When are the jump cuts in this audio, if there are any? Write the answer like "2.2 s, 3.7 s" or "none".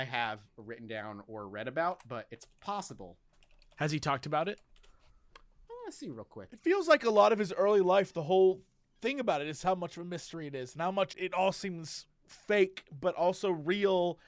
11.1 s